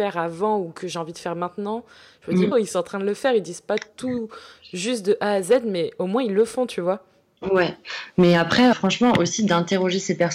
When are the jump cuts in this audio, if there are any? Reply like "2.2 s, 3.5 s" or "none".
2.5 s, 8.7 s